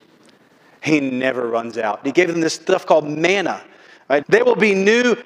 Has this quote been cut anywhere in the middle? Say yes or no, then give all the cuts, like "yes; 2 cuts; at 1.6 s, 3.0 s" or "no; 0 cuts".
yes; 2 cuts; at 2.0 s, 4.2 s